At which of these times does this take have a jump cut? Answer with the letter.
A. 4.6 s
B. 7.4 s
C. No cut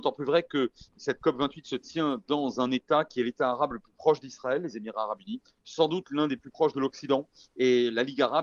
C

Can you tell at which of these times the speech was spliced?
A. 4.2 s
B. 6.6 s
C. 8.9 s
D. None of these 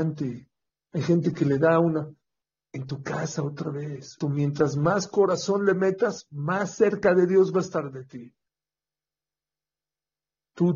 A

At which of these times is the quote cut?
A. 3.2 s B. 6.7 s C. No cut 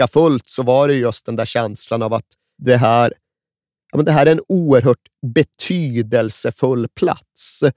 C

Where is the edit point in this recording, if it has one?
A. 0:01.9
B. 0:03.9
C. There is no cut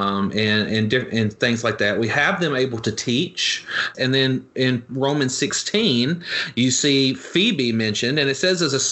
B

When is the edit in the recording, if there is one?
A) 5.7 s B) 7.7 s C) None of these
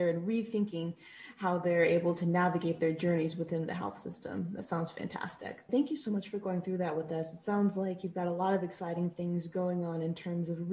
A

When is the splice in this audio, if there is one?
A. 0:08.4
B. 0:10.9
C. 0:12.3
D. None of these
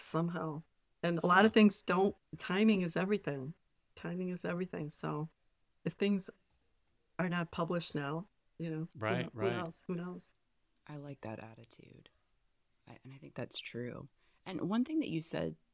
A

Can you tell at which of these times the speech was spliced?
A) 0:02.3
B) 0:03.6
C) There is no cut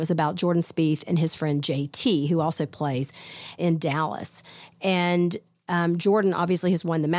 B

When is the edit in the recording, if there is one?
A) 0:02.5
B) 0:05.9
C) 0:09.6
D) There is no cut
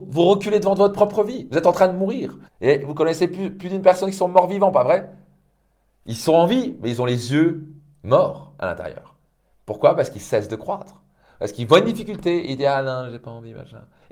A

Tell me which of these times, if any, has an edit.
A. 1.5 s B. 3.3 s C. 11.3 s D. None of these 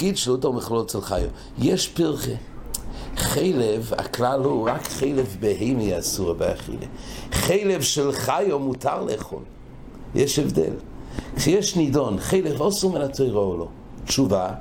D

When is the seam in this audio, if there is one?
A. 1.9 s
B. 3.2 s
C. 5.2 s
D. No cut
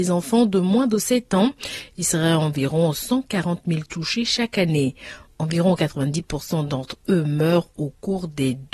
D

